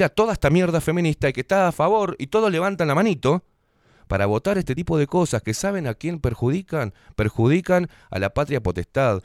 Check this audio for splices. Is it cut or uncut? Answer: uncut